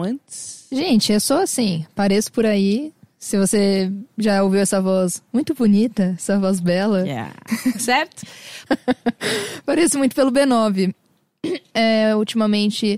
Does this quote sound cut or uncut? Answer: cut